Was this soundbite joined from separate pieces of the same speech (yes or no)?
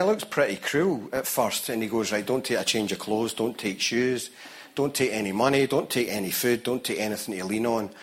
no